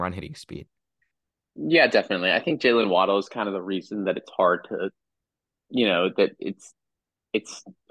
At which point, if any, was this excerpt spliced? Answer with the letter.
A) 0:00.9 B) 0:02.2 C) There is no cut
C